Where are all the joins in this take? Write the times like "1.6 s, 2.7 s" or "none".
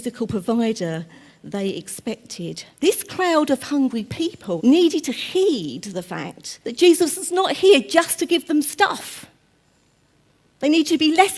4.6 s, 6.6 s